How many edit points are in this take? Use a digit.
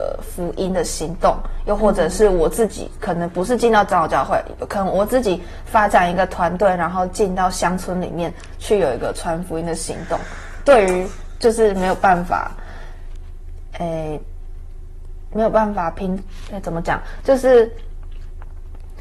0